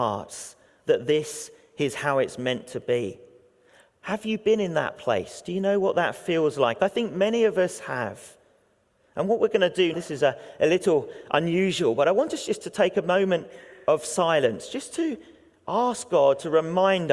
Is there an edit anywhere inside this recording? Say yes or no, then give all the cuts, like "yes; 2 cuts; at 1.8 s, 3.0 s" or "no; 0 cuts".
yes; 1 cut; at 9.9 s